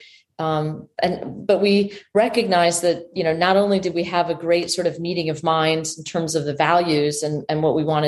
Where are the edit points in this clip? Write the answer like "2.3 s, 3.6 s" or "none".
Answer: none